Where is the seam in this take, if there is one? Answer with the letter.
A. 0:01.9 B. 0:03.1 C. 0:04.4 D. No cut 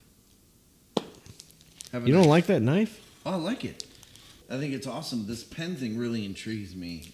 C